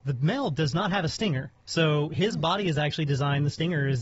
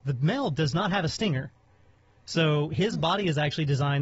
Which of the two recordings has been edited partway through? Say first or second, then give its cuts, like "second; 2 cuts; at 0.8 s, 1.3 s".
first; 1 cut; at 1.6 s